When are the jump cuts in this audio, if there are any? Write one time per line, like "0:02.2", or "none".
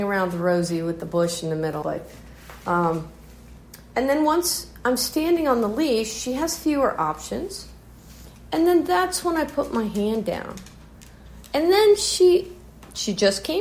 0:01.8